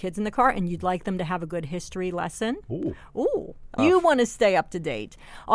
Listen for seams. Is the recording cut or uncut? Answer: cut